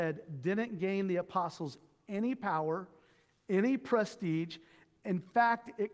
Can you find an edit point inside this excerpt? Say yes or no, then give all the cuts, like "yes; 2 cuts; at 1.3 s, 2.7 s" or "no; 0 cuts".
no; 0 cuts